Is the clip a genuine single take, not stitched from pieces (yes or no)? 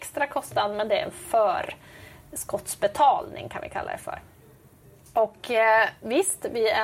yes